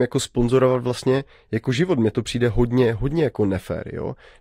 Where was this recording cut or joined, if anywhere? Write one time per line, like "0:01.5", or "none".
none